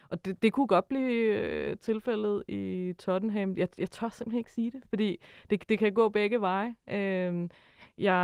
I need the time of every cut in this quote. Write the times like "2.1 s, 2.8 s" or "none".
none